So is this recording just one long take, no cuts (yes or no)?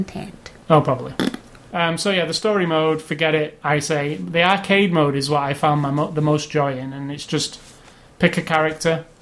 yes